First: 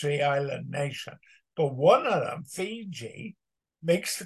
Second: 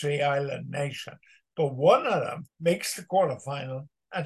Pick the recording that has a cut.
second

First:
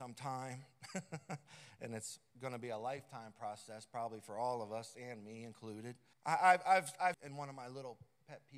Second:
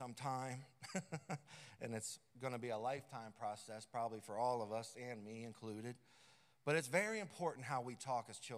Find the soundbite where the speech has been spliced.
first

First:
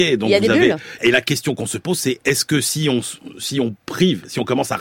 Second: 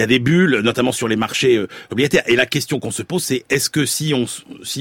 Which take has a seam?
first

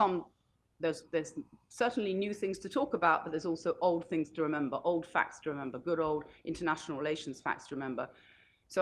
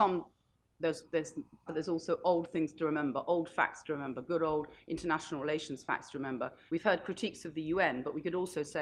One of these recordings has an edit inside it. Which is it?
second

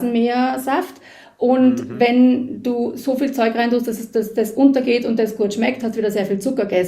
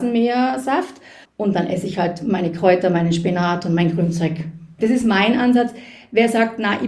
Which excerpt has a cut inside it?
second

